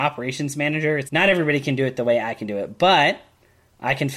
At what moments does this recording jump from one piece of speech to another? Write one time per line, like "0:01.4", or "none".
0:01.1